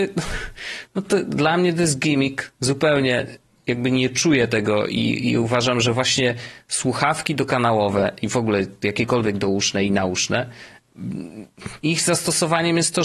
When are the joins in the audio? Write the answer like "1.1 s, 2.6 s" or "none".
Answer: 11.8 s